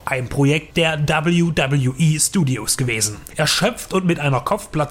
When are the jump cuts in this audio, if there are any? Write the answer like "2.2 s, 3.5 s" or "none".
3.3 s